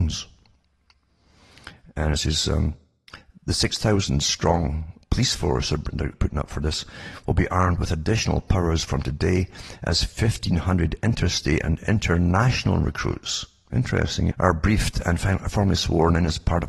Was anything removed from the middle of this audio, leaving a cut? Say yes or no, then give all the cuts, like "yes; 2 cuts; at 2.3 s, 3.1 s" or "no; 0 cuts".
yes; 2 cuts; at 6.2 s, 14.3 s